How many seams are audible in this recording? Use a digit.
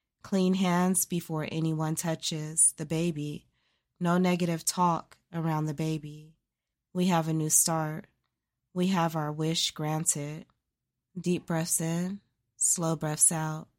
2